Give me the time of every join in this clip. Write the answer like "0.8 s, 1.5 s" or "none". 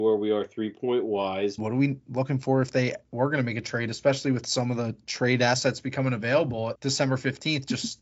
1.6 s, 6.7 s